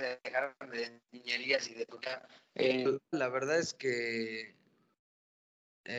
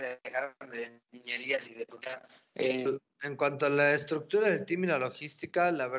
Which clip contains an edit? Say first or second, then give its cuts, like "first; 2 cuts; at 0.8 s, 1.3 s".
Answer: first; 1 cut; at 3.1 s